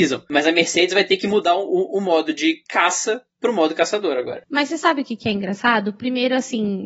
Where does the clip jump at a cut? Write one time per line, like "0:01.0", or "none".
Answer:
none